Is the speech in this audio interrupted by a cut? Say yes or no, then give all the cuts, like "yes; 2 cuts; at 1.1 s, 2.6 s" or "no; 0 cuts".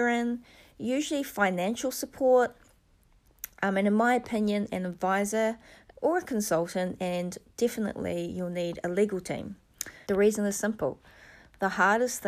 yes; 2 cuts; at 5.9 s, 10.0 s